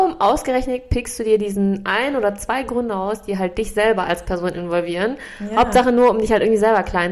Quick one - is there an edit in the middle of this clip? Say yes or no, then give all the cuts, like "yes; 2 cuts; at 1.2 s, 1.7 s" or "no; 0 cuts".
no; 0 cuts